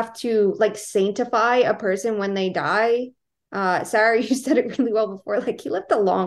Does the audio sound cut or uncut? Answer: uncut